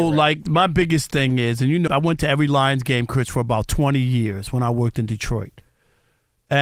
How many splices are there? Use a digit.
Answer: 1